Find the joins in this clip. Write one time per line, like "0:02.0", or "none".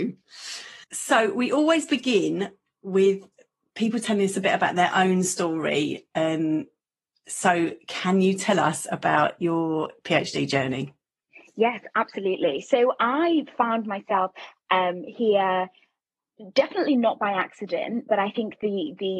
none